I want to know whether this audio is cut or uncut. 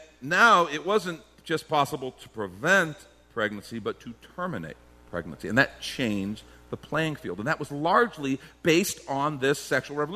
uncut